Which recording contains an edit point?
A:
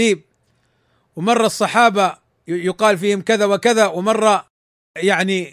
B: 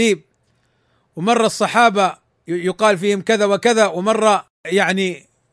B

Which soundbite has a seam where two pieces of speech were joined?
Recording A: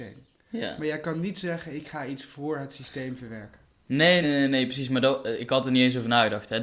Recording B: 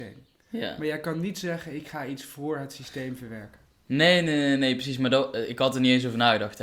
A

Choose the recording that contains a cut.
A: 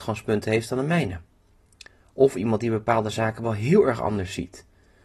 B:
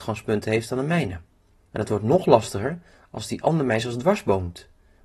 B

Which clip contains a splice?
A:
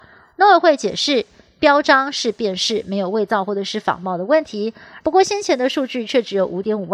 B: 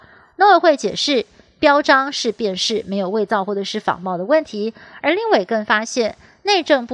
A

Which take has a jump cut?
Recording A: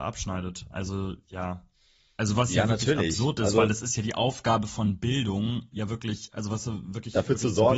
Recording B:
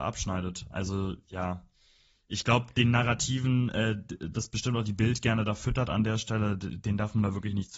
A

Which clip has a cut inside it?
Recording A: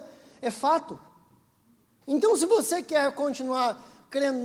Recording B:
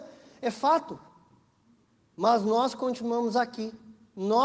A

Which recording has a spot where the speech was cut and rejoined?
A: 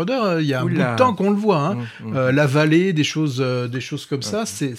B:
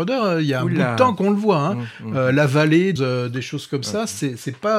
B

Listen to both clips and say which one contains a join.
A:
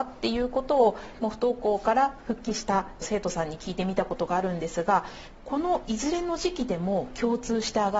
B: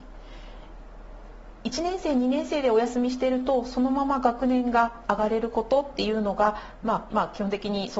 B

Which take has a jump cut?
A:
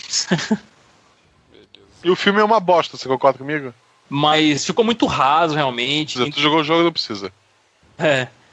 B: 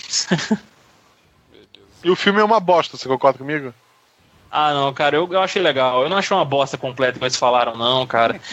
A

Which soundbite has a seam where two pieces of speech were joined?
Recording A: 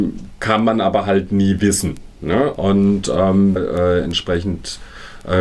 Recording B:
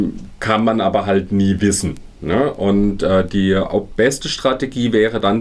A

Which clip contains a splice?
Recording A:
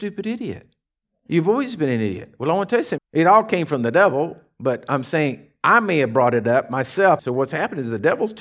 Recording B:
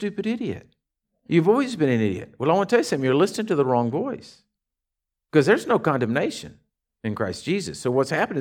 A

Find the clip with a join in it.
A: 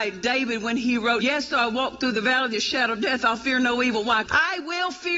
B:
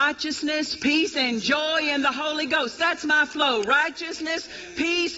A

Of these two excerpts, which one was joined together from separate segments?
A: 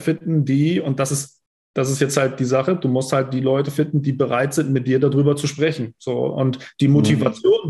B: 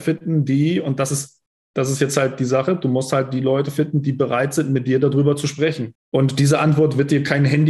B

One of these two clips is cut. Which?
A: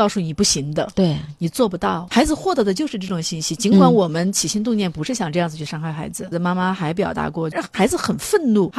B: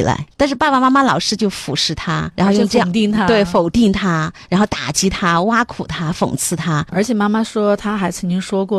A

